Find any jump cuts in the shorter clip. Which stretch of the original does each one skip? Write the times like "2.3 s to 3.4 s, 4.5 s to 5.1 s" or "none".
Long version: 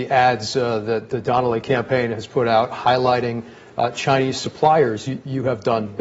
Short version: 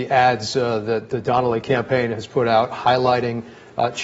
none